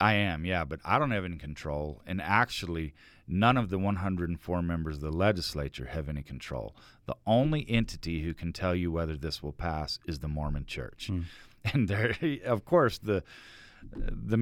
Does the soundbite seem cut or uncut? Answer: uncut